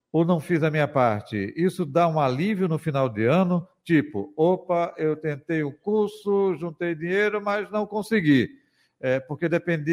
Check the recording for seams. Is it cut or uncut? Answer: uncut